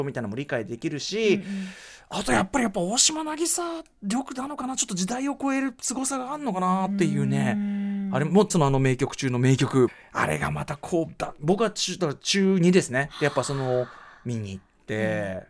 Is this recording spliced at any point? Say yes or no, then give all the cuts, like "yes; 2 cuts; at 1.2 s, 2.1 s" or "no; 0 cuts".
yes; 2 cuts; at 8.5 s, 9.9 s